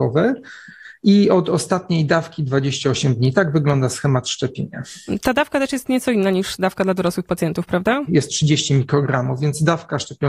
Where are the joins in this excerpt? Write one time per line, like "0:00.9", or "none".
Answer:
0:08.1